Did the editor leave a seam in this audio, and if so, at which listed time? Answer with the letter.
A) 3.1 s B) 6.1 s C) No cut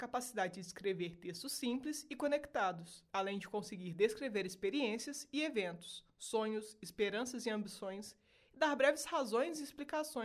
A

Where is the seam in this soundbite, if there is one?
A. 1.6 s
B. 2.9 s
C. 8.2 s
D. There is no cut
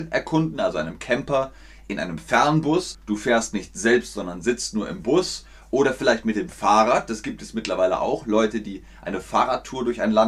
B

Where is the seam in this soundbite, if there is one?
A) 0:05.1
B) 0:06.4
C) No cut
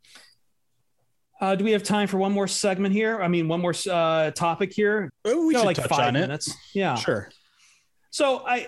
A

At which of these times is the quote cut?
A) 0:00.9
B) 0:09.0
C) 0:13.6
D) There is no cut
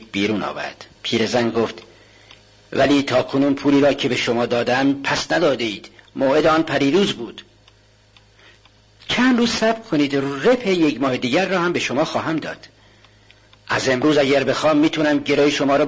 A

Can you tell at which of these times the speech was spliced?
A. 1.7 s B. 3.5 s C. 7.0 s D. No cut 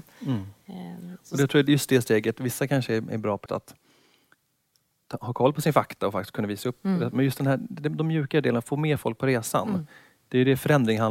B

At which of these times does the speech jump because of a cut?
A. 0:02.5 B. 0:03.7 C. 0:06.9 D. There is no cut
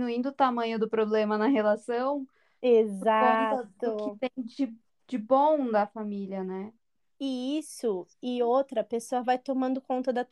D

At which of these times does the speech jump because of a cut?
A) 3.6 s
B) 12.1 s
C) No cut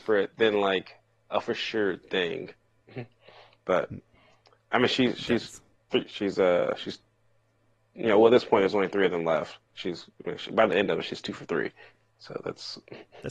C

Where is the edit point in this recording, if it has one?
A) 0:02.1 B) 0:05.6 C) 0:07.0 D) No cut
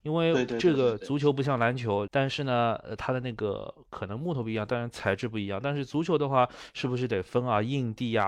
A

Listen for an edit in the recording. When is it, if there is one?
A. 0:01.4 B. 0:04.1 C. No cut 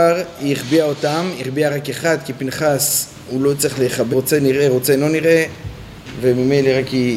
B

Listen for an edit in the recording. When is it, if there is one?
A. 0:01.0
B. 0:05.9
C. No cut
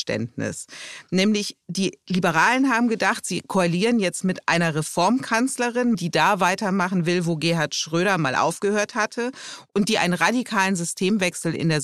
B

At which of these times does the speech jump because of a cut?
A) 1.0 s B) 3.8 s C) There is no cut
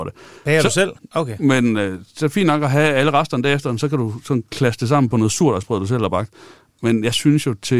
A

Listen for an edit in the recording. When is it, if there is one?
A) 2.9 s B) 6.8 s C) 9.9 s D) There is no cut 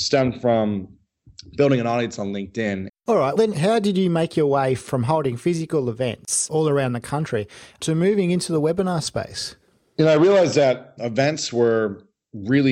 A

